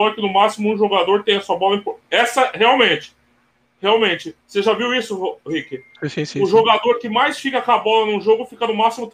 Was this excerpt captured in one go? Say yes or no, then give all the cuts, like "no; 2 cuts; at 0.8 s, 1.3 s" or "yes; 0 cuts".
yes; 0 cuts